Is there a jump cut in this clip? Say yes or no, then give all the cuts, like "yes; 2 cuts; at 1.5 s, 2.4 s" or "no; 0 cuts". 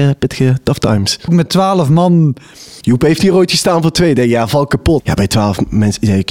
yes; 3 cuts; at 1.3 s, 2.8 s, 5.0 s